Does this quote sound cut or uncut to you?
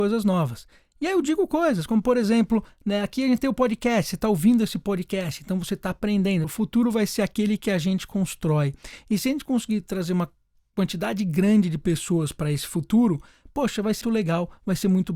cut